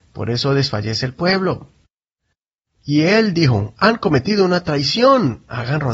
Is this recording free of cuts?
no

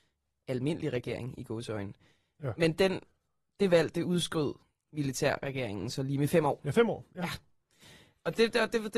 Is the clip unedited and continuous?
yes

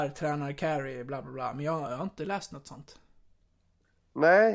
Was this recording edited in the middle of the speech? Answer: no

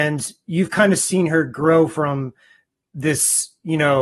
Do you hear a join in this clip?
no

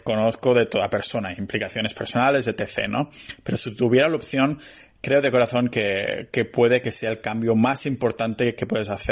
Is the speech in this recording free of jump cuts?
yes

